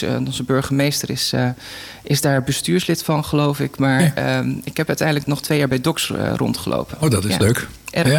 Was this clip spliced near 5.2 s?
yes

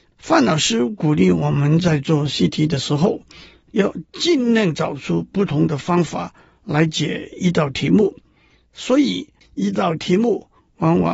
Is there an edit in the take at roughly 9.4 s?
yes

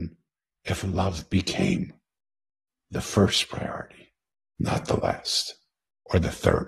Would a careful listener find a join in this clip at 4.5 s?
no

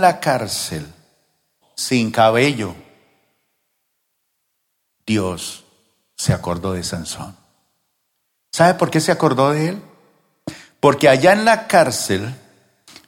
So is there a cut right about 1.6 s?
yes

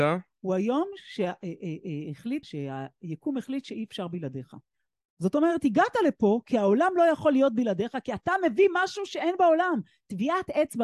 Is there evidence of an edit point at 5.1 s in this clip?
yes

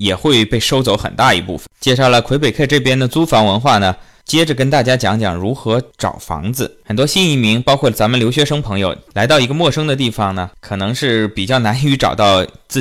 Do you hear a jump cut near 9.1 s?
yes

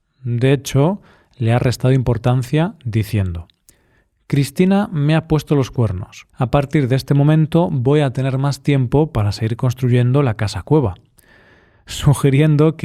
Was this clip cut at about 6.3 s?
yes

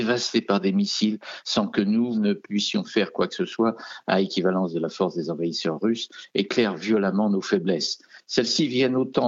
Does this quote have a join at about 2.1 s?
yes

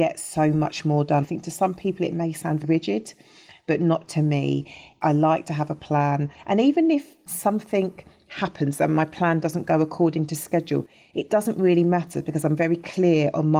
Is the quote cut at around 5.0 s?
no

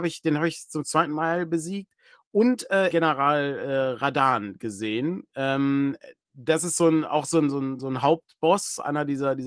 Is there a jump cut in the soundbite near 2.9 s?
yes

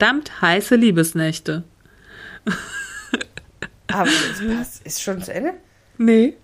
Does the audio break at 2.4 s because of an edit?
no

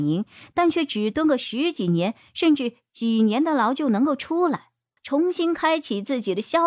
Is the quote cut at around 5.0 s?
yes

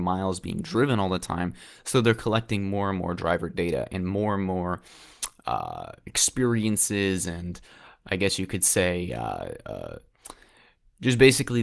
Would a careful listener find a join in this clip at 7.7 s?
no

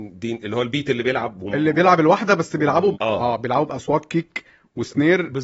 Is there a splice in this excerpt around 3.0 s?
yes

